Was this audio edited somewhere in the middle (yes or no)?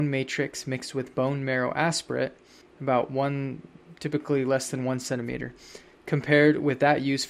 yes